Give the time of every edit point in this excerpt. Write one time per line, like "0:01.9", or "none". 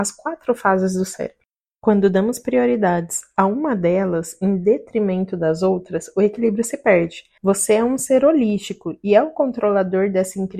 0:07.4